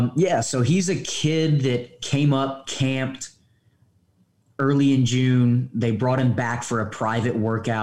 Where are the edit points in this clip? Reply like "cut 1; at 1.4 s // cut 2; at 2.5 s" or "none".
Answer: none